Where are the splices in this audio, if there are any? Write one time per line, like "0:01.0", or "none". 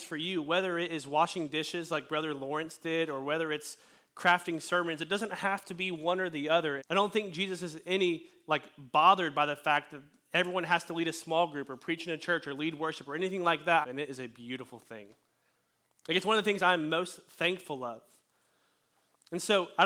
0:06.8
0:13.8